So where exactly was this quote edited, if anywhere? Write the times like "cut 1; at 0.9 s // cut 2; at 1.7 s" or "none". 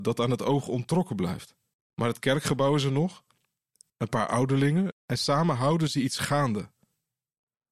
cut 1; at 1.7 s // cut 2; at 3.9 s // cut 3; at 4.9 s